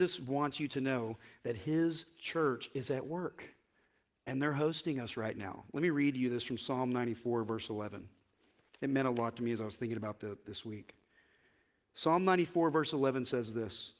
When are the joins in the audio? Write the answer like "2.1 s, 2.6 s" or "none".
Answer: none